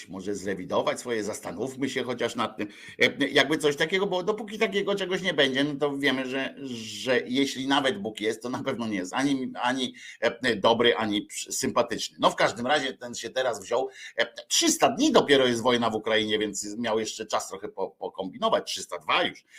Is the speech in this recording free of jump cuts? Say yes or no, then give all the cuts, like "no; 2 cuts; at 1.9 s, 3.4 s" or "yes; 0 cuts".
yes; 0 cuts